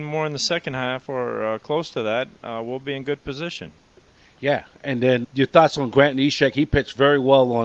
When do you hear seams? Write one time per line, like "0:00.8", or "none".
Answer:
0:05.2